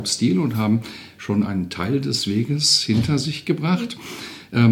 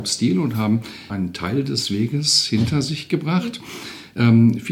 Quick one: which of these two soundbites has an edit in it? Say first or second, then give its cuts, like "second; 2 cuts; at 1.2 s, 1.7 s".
second; 1 cut; at 1.1 s